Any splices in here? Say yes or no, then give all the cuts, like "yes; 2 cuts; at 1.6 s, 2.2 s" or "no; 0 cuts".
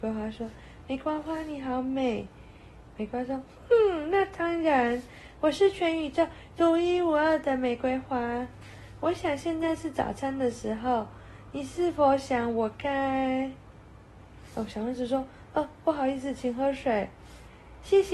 no; 0 cuts